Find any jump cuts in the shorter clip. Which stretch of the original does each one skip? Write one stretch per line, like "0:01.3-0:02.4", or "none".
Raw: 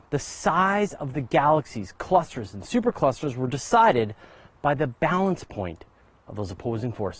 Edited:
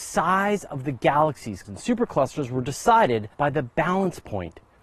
0:01.9-0:02.5
0:04.2-0:04.6